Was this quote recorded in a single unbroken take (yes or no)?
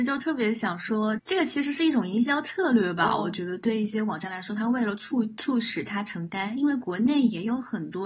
no